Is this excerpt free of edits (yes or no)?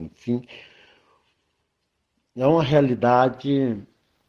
yes